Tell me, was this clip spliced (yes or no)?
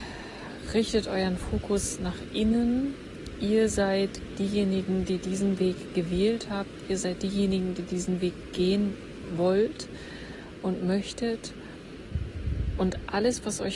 no